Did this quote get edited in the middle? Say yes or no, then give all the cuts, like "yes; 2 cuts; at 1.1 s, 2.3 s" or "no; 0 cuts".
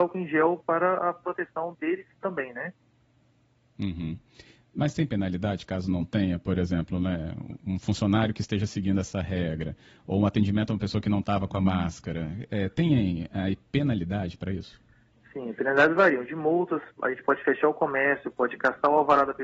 no; 0 cuts